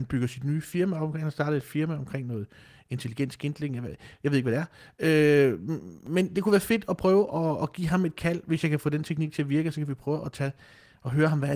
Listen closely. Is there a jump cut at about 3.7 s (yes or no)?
no